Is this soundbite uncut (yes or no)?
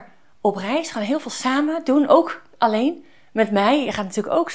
yes